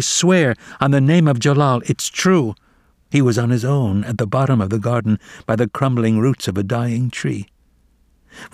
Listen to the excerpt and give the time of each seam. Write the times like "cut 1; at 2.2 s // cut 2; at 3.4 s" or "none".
cut 1; at 2.9 s